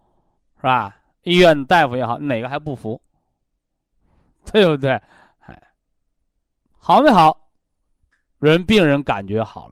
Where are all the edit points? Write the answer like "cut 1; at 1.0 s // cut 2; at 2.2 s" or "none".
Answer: none